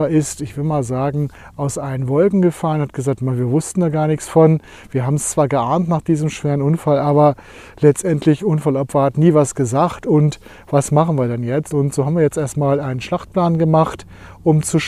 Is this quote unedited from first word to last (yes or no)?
yes